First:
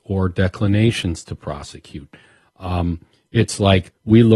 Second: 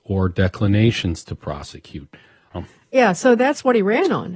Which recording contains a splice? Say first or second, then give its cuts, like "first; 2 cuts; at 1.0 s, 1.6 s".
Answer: second; 1 cut; at 2.5 s